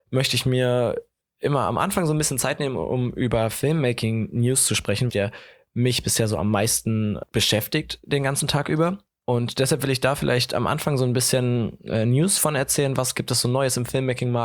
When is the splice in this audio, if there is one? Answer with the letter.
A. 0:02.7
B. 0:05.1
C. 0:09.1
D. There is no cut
B